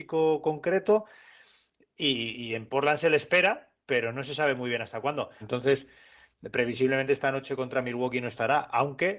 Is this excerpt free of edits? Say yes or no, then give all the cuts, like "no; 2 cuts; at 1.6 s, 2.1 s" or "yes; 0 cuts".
no; 1 cut; at 5.4 s